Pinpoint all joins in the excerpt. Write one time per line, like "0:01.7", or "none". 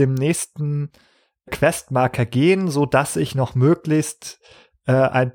none

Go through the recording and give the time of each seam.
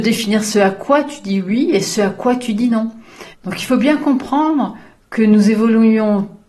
0:03.3

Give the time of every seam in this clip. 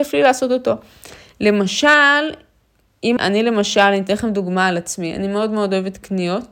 0:03.2

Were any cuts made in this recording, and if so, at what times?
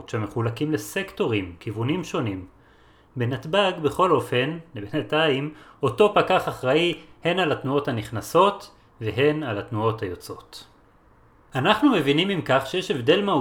none

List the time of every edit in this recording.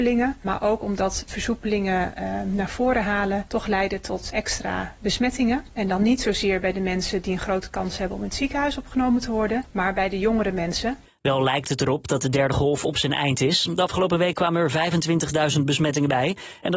0:04.3

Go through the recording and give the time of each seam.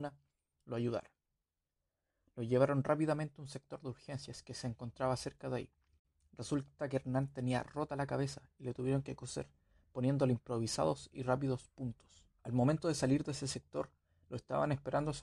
0:12.4

